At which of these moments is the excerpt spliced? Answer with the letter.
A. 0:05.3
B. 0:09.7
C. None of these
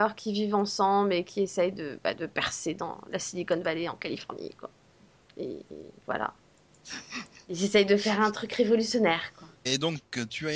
B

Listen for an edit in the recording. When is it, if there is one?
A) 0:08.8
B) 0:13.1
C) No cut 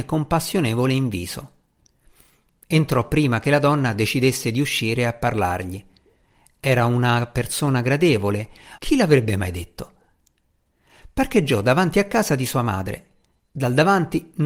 A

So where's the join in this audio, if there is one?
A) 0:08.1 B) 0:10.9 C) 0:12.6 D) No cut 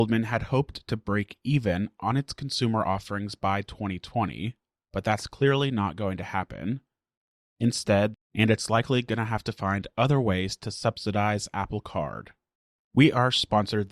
A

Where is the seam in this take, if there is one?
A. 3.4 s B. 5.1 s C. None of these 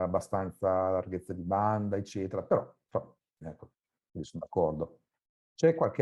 A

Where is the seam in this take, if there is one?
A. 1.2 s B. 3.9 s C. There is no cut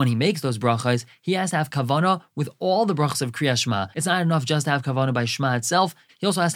B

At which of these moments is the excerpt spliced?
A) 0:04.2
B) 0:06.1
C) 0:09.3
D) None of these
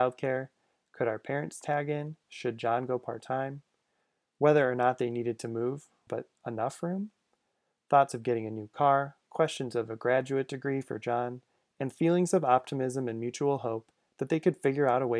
B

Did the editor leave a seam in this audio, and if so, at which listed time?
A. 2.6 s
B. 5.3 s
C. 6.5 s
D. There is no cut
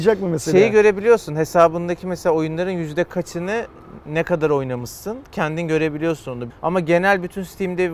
C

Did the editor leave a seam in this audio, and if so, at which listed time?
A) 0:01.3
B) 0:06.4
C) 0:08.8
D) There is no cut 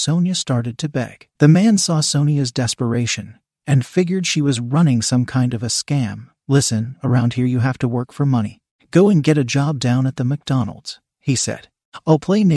A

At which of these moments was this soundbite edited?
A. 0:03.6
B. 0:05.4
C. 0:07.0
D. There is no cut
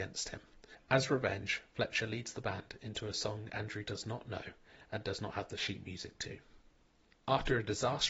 D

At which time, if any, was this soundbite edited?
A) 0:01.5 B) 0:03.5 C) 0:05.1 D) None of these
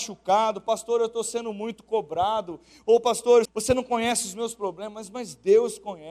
B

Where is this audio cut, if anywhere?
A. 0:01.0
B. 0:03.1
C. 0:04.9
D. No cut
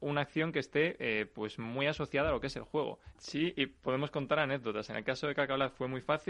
B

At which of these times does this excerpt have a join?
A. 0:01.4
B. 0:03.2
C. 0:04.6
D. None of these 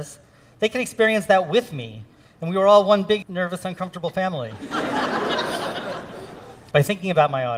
B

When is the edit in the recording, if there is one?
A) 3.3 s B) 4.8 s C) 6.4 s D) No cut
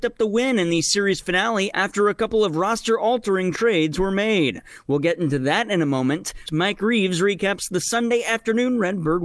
C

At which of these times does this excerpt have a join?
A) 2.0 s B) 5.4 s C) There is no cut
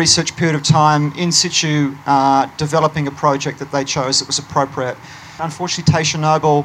B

